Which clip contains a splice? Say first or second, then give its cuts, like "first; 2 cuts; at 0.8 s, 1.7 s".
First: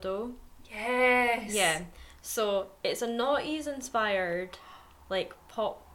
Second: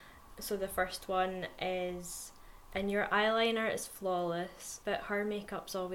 second; 1 cut; at 4.8 s